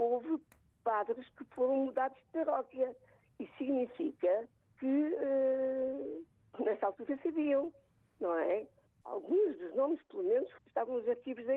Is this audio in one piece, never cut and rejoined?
no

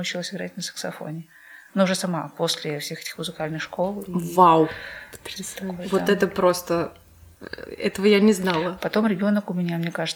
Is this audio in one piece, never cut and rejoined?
yes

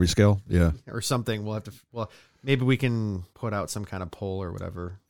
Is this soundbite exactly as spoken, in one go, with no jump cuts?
no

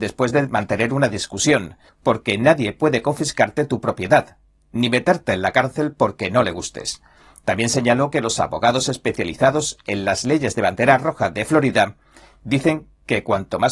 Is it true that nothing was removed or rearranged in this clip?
no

